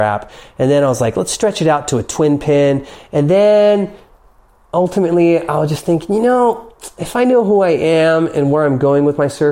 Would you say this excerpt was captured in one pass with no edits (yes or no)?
yes